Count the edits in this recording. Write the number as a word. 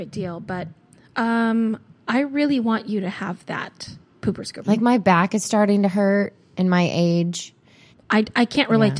two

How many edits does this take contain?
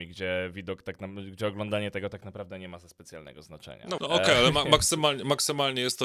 one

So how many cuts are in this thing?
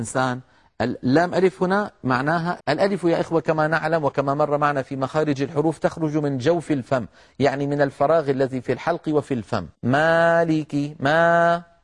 two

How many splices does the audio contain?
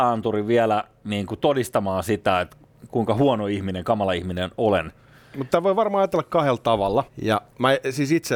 one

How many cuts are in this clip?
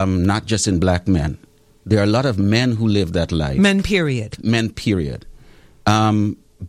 zero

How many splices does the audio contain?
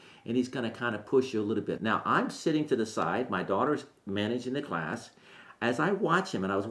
one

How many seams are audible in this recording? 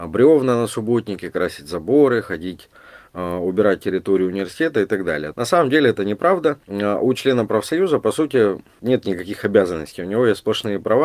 one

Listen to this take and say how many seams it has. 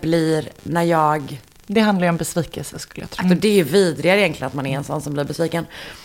one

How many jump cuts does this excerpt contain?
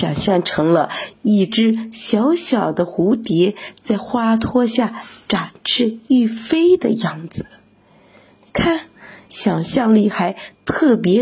two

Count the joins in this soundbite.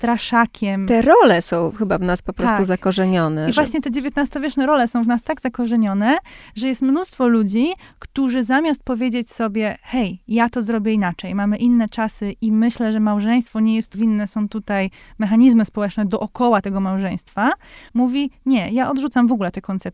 two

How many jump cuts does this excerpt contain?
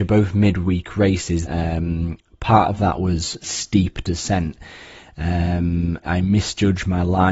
three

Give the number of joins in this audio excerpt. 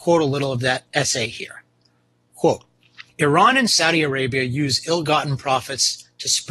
one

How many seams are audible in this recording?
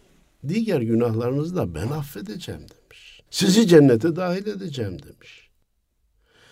one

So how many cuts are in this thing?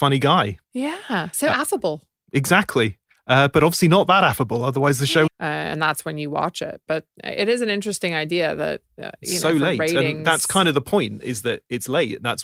one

